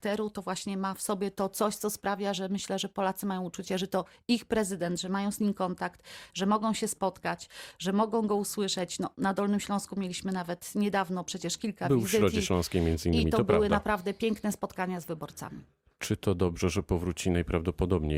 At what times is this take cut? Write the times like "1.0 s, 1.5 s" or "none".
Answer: none